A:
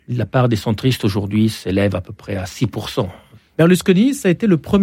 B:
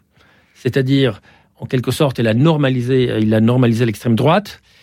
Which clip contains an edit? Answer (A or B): A